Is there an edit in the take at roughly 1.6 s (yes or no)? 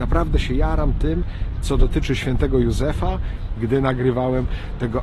no